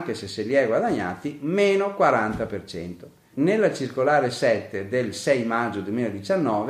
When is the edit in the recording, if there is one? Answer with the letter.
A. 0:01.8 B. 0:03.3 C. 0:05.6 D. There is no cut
B